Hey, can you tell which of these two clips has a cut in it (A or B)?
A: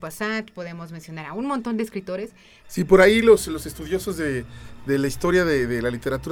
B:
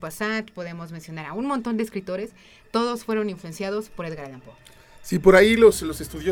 A